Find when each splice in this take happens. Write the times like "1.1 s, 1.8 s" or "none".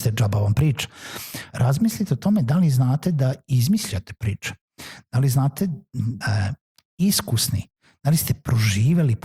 1.5 s, 6.2 s